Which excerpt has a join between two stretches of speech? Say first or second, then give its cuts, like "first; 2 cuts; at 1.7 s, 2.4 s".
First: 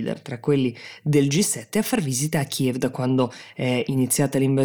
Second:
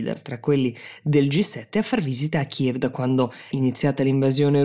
second; 1 cut; at 3.5 s